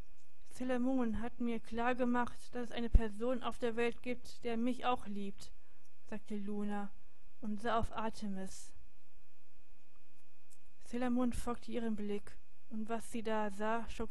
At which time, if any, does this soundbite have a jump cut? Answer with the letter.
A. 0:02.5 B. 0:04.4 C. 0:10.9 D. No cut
D